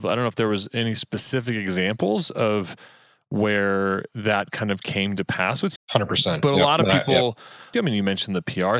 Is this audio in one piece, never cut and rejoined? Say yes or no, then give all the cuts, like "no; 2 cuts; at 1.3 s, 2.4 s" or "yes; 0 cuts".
no; 2 cuts; at 5.8 s, 7.7 s